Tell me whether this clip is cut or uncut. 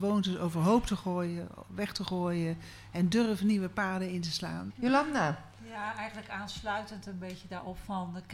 cut